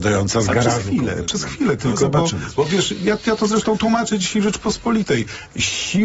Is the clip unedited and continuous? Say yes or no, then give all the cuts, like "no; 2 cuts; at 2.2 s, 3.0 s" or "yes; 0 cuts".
yes; 0 cuts